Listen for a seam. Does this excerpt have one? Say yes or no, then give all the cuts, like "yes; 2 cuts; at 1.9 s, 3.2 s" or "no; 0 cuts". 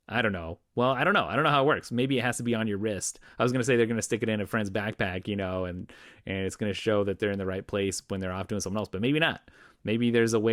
no; 0 cuts